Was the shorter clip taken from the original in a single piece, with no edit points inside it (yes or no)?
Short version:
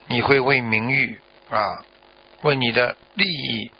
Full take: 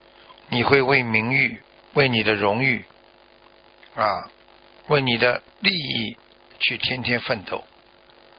no